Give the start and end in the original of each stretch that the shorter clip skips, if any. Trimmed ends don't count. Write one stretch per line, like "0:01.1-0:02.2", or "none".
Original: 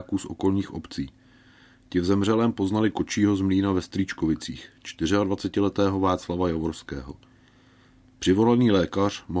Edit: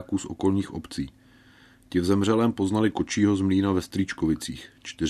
none